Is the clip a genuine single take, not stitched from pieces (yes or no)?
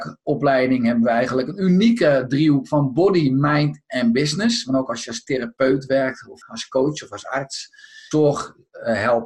no